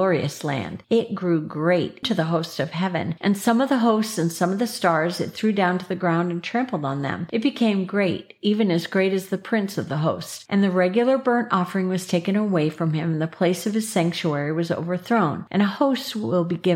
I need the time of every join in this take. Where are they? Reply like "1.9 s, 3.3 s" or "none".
2.0 s